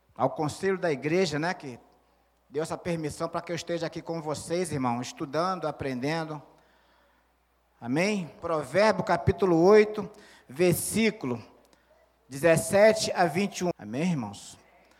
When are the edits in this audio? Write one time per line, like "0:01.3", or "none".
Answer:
0:08.4
0:13.7